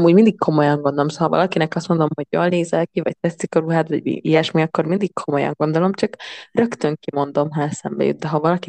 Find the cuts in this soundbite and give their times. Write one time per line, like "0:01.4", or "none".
none